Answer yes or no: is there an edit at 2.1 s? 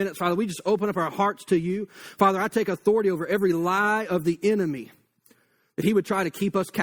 no